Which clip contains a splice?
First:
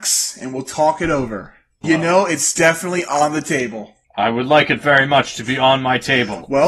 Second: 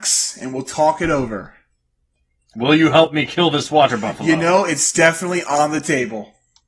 first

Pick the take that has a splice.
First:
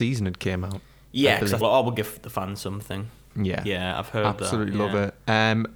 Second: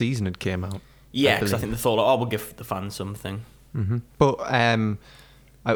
first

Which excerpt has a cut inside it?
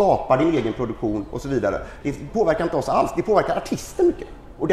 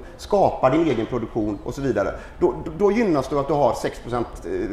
first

